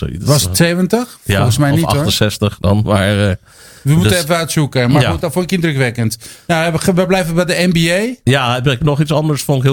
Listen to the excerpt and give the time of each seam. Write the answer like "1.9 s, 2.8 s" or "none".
none